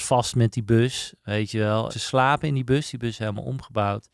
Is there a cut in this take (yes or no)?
yes